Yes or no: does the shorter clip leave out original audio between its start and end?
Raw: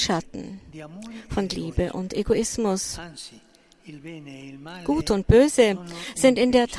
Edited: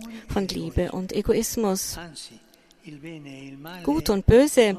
no